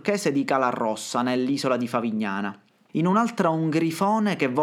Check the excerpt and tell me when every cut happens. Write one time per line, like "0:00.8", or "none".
0:02.9